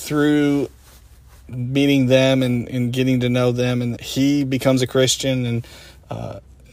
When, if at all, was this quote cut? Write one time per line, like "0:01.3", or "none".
0:04.0